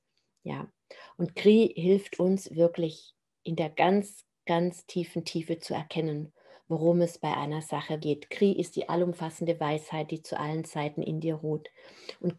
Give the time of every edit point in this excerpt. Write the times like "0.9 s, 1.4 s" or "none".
8.0 s